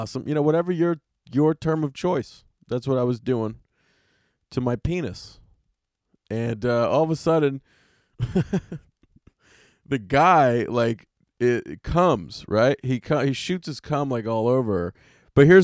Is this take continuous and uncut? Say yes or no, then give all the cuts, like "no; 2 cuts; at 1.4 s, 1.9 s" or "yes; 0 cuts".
yes; 0 cuts